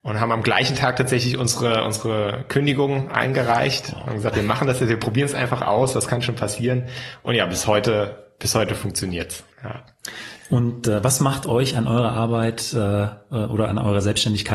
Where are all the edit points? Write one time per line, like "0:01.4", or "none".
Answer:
0:09.5

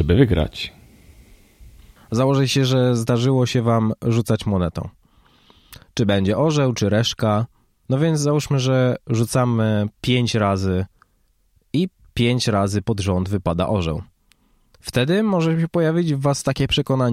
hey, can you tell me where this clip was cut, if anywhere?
0:07.8

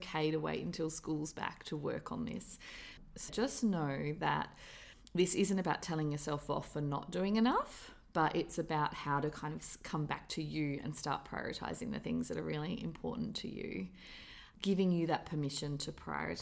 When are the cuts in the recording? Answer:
0:03.3

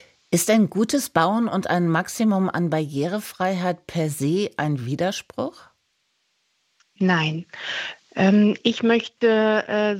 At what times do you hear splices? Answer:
none

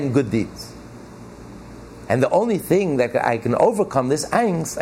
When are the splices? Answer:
0:02.1

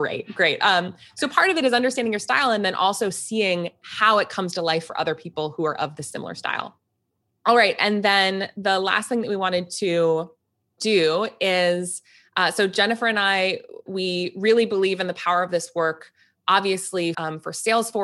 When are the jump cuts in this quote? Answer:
0:17.1

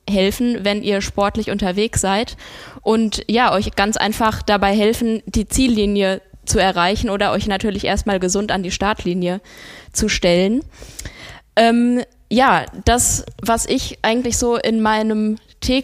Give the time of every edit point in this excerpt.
none

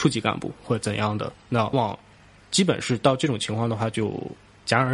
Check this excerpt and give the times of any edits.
0:01.7

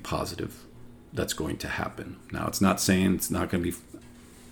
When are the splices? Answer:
none

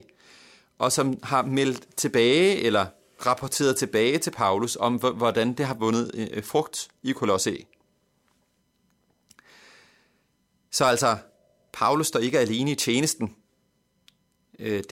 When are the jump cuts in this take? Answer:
none

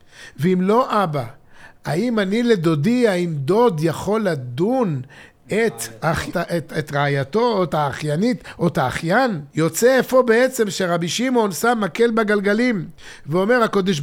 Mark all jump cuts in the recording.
0:06.3
0:09.5

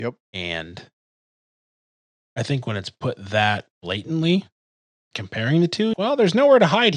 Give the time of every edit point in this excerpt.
0:03.7
0:05.9

